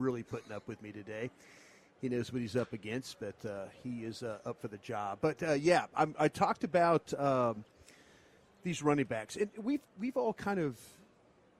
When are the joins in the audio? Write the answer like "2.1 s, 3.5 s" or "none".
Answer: none